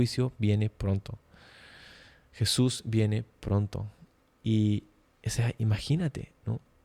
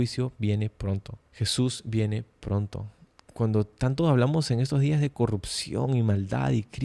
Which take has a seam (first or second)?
second